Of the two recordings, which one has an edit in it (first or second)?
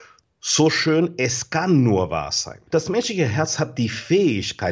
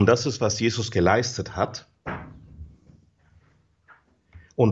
first